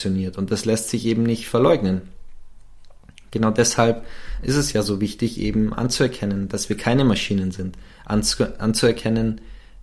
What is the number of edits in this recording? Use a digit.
0